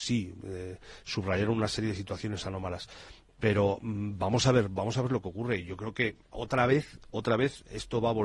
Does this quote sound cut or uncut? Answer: uncut